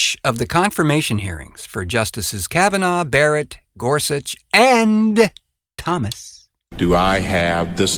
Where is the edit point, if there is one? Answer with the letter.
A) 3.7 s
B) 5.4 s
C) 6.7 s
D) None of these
C